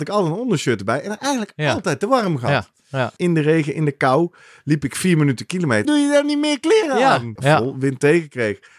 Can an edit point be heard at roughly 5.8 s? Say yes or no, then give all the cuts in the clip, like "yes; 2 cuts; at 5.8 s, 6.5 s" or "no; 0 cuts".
yes; 3 cuts; at 3.2 s, 5.8 s, 7.4 s